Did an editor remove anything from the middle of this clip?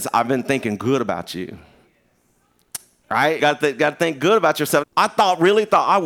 yes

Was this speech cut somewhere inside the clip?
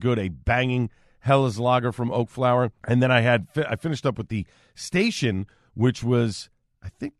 yes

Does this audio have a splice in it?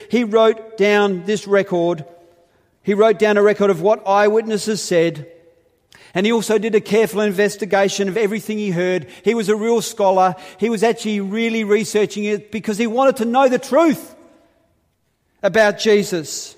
no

